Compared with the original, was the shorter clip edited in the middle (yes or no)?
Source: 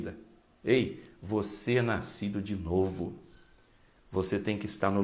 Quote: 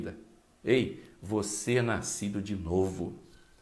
no